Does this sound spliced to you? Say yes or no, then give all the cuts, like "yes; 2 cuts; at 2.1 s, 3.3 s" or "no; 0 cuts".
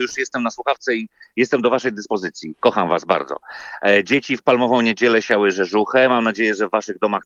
no; 0 cuts